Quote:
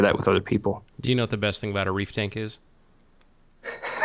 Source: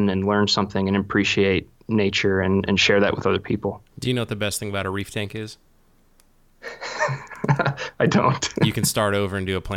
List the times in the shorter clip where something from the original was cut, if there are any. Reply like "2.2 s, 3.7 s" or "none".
none

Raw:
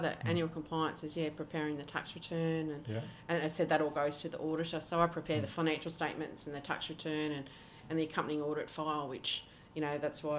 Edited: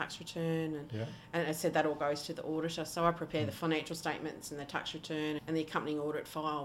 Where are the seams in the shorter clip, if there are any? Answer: 5.4 s

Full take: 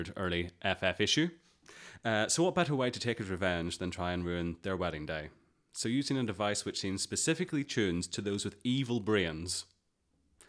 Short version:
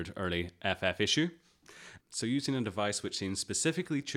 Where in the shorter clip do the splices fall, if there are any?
2.0 s

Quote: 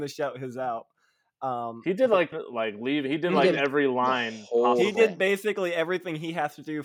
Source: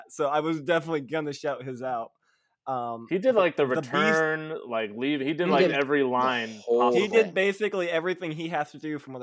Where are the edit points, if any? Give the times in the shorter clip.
2.3 s

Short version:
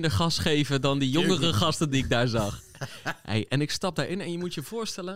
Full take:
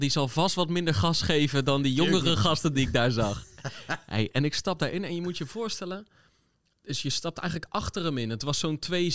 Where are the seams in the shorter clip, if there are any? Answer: none

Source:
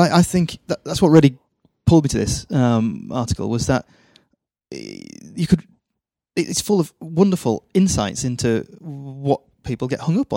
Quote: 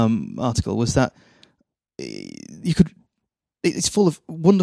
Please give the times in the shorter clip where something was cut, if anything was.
none

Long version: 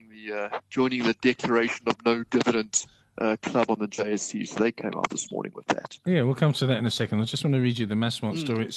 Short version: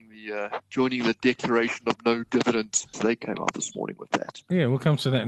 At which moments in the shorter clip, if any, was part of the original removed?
2.9 s

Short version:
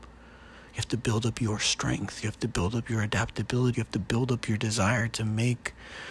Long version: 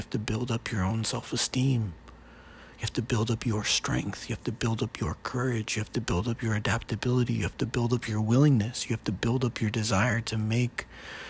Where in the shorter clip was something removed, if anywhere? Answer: 2.2 s, 3.7 s

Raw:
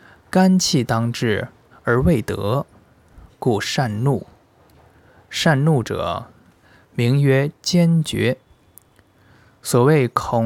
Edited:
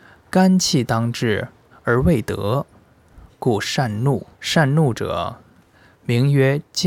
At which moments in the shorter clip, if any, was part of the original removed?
4.3 s

